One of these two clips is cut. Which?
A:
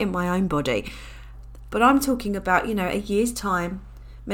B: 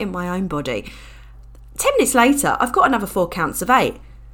A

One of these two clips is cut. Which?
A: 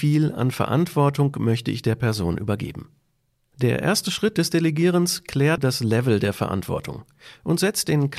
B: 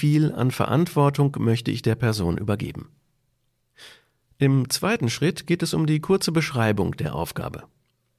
A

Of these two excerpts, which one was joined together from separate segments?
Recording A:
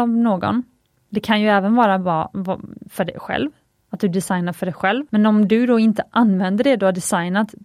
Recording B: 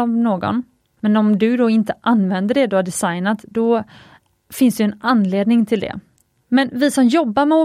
B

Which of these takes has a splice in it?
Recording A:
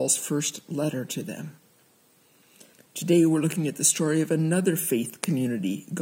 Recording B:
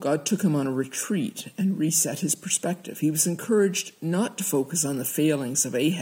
A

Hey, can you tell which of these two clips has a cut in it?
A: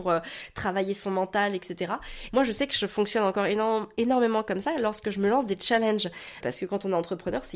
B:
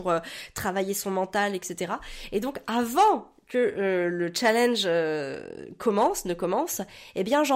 A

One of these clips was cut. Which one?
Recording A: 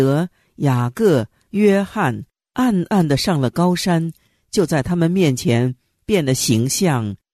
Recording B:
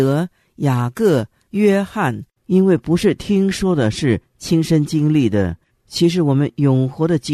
B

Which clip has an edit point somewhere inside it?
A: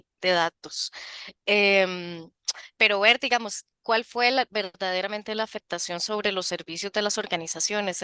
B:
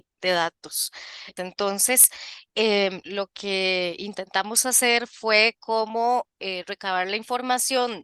B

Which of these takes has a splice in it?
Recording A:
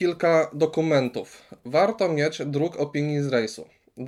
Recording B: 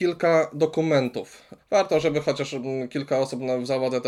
B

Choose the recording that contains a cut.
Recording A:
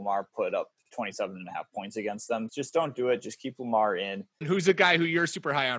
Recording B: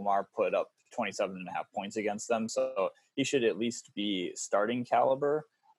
A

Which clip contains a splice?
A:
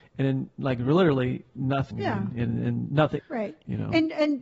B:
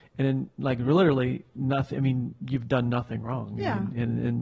A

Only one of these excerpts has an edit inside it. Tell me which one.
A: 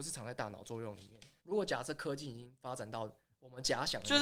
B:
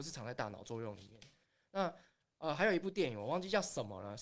A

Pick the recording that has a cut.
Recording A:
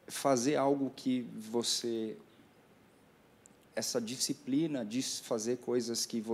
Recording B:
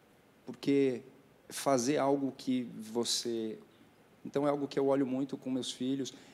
B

